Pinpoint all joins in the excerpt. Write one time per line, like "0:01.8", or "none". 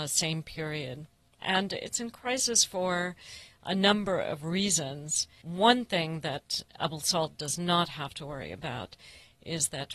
0:01.4
0:05.4